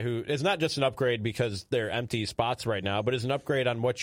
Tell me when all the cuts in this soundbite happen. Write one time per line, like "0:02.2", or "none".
none